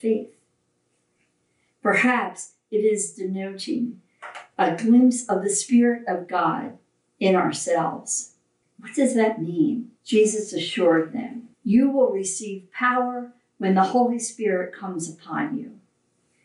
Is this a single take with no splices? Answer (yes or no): no